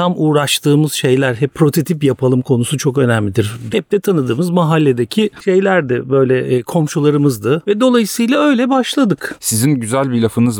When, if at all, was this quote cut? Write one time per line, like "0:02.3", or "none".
0:03.7